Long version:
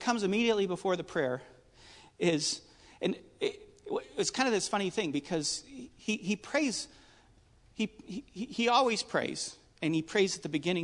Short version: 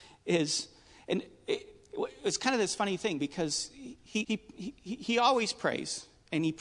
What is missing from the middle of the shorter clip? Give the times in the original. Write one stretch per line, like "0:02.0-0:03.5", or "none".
0:06.2-0:07.7